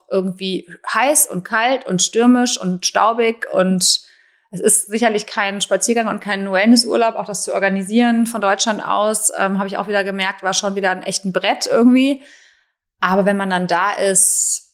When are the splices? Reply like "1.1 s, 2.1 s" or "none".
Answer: none